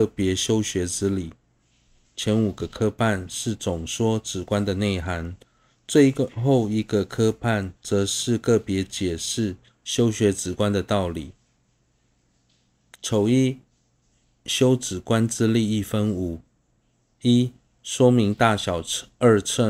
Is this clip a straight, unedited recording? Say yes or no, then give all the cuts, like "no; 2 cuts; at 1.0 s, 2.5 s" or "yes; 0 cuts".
no; 1 cut; at 2.1 s